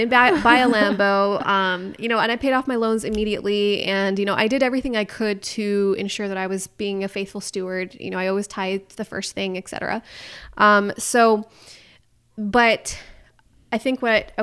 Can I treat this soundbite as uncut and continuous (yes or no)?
yes